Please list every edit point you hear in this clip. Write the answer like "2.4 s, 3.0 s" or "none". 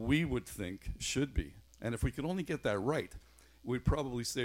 1.7 s